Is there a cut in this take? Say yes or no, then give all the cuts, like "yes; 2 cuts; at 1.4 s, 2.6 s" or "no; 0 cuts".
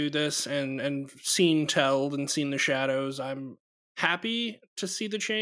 no; 0 cuts